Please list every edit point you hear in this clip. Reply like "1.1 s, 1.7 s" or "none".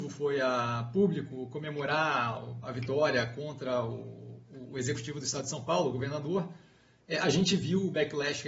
none